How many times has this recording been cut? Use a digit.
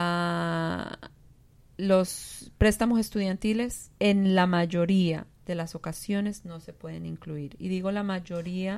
1